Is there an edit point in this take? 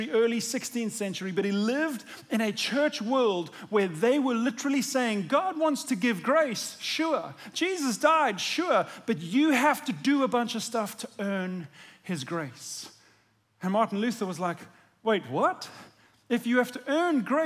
no; 0 cuts

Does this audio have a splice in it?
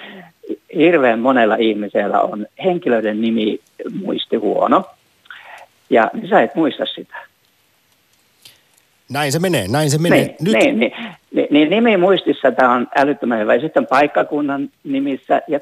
yes; 1 cut; at 6.1 s

